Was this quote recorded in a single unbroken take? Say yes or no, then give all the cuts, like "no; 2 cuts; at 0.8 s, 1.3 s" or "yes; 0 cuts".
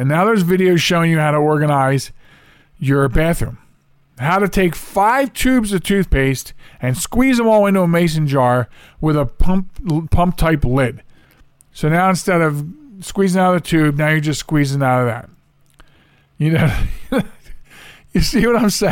yes; 0 cuts